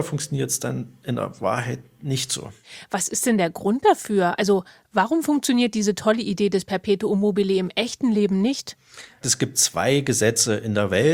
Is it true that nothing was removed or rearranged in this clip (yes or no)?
yes